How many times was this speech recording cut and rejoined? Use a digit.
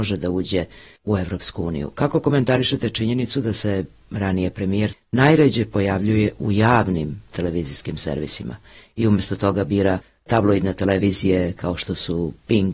1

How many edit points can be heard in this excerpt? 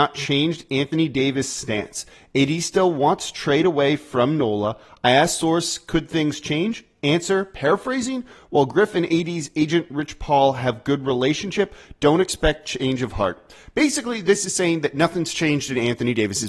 0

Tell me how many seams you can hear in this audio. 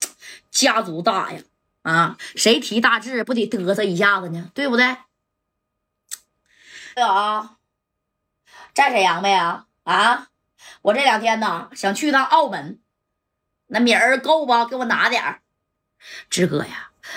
1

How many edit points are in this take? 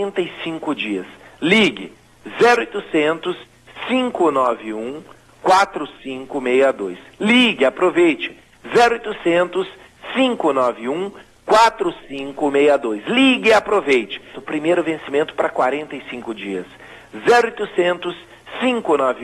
1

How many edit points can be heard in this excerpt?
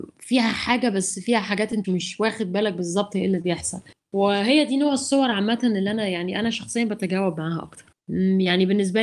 1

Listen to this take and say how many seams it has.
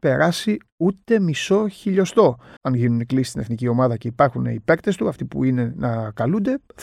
1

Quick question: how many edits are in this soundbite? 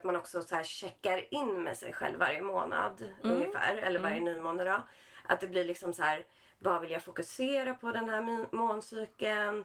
0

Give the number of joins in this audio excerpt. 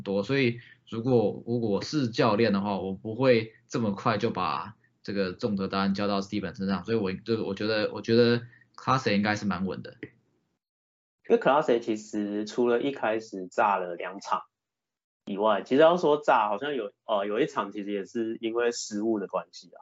0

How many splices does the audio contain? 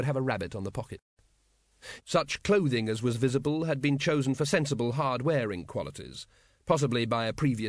1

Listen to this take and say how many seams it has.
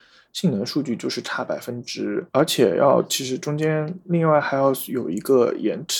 1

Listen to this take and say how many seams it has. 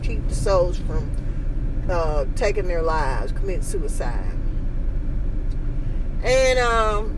0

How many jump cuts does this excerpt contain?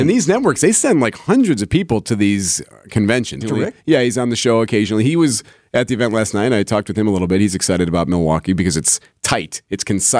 1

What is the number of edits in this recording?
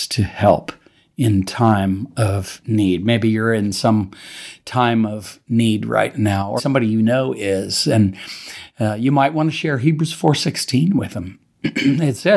1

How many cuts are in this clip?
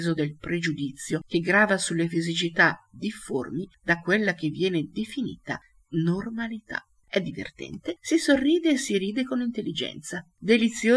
1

